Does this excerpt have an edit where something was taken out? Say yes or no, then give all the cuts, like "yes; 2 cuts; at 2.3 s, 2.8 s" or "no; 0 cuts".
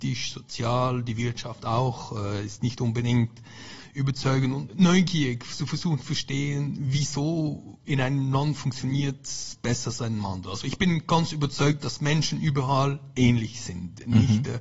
yes; 1 cut; at 4.7 s